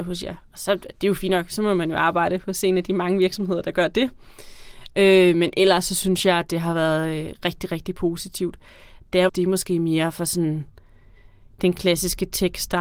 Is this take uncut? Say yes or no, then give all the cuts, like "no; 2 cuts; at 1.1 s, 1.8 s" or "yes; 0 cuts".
no; 1 cut; at 9.3 s